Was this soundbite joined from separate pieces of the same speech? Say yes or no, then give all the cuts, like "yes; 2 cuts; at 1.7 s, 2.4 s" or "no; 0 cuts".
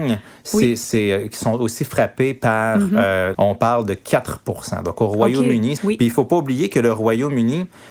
yes; 2 cuts; at 3.3 s, 5.8 s